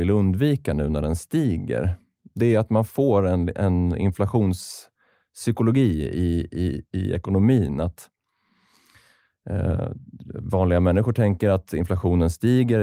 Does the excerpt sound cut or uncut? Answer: uncut